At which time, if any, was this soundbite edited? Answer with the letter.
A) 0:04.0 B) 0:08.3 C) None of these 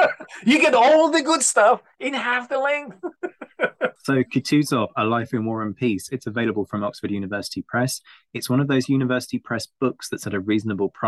A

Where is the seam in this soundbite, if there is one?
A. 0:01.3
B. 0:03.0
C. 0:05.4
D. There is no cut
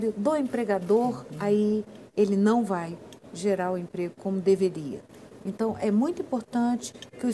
C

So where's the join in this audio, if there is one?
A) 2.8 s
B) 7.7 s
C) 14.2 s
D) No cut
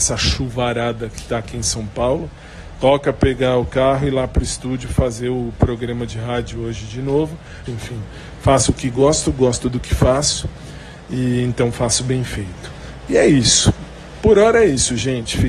B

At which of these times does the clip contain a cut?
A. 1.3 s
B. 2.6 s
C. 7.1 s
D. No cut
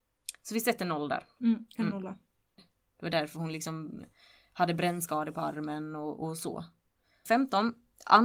B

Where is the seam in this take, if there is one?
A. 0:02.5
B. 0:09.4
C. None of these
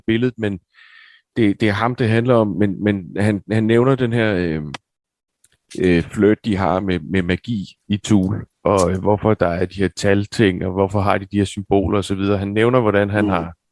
C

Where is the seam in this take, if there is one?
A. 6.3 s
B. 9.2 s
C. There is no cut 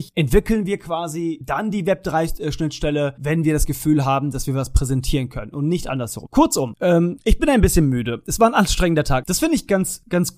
B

